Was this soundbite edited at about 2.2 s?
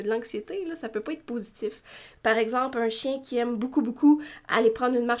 yes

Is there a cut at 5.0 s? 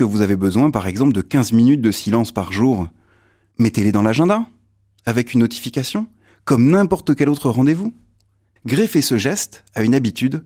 no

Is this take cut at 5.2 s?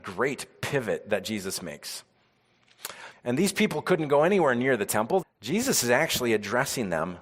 yes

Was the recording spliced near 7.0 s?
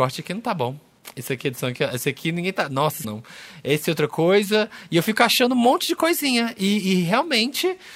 no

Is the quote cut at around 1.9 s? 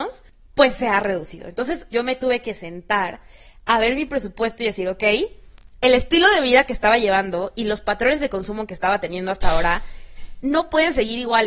yes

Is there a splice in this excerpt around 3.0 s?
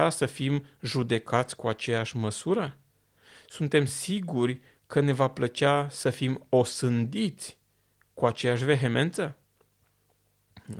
no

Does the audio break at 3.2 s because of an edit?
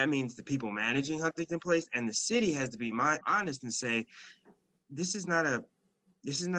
yes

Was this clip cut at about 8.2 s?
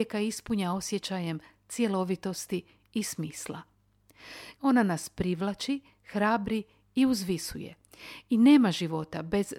no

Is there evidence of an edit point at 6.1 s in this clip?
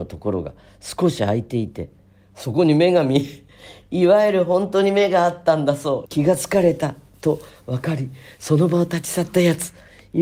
yes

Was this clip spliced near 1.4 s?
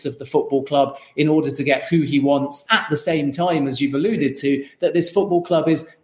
no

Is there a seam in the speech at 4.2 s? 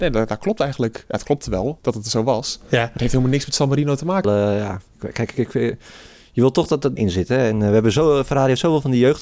yes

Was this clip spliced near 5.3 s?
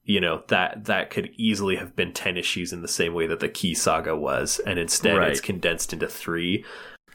no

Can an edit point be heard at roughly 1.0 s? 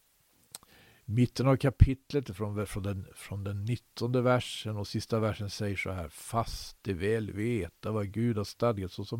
no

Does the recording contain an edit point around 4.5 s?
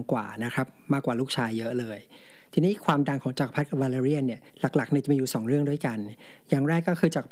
yes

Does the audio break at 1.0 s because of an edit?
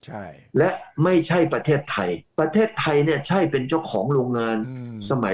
no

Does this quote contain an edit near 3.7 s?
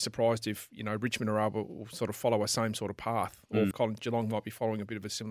yes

